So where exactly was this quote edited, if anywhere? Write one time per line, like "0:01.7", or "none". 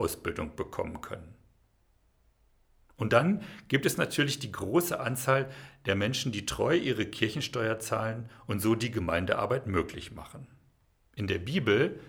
0:11.1